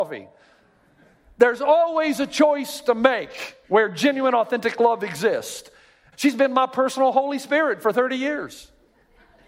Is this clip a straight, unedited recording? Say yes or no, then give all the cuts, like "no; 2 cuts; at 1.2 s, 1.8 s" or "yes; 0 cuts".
no; 2 cuts; at 3.6 s, 6.1 s